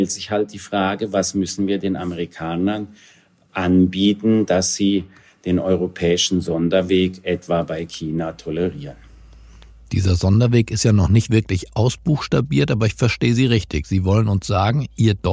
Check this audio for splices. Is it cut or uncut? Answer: uncut